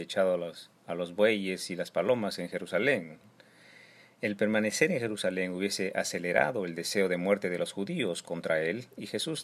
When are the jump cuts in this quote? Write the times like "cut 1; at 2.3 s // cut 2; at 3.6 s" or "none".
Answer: none